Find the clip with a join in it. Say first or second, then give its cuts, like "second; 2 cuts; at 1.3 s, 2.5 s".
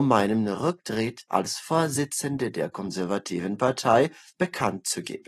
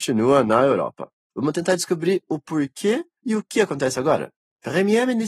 second; 1 cut; at 1.2 s